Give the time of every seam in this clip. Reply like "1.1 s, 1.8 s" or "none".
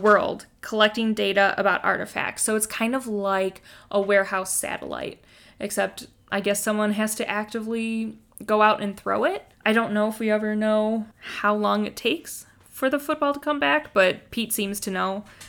9.5 s, 11.1 s